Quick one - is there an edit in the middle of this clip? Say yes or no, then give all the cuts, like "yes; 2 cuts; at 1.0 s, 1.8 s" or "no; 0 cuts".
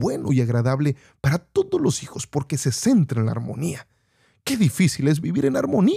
no; 0 cuts